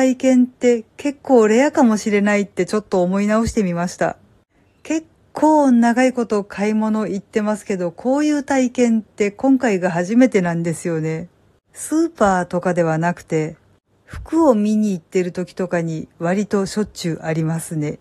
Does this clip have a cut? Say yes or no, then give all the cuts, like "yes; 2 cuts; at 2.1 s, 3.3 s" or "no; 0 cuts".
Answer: yes; 1 cut; at 11.7 s